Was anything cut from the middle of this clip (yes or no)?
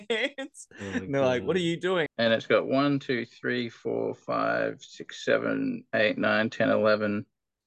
yes